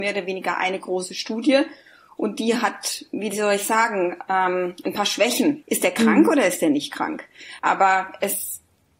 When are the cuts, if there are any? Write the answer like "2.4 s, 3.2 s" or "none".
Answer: 5.6 s, 7.6 s